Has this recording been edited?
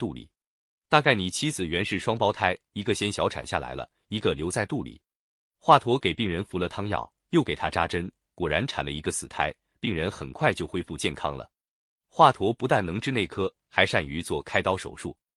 no; 0 cuts

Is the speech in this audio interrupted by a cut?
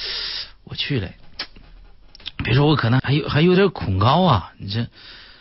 yes; 1 cut; at 3.0 s

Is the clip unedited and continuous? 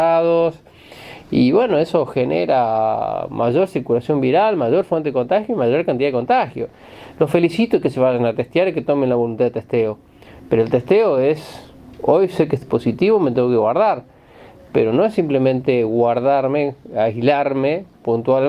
yes; 0 cuts

